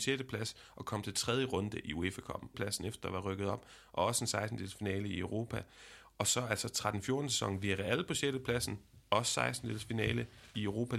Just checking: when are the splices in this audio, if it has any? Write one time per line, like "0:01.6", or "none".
0:02.5